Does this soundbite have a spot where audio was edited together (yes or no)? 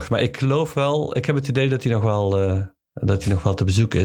no